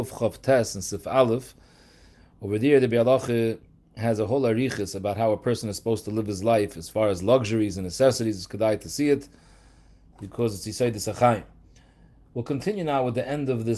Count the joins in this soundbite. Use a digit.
0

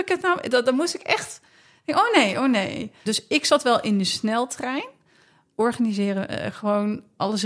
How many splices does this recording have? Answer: 1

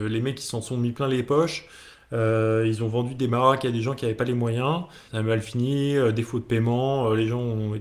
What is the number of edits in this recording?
1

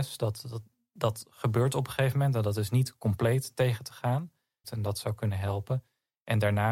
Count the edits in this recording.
1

